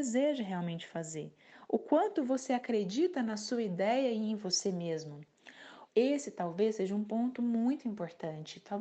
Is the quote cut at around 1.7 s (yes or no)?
no